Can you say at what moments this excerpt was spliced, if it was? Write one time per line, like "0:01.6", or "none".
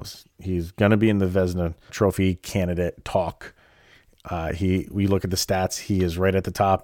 0:01.9

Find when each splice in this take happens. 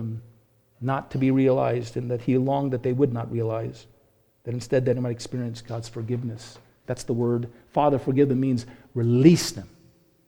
0:06.8

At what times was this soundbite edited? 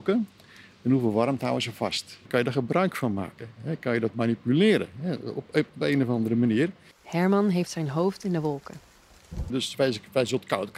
0:02.3
0:06.9
0:09.5

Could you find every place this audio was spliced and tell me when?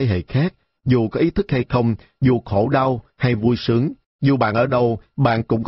0:04.0

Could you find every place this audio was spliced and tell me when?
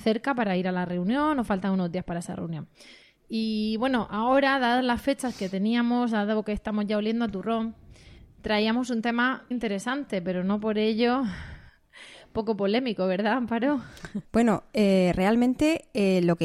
0:09.5
0:14.2

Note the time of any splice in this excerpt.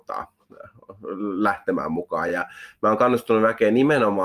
none

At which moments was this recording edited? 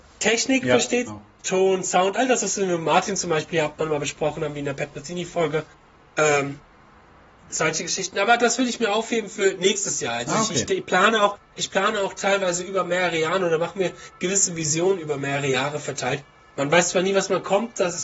0:01.1

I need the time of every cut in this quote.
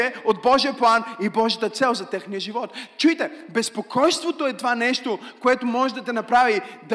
none

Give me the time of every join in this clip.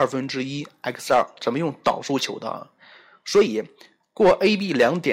none

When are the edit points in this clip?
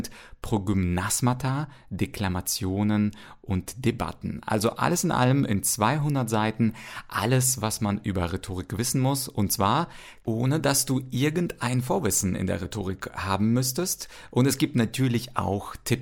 none

